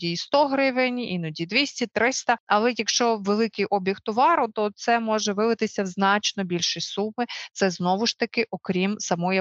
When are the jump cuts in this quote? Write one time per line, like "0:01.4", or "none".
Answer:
none